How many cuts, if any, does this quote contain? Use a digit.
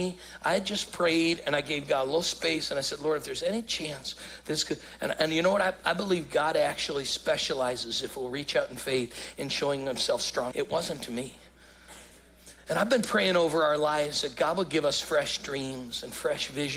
1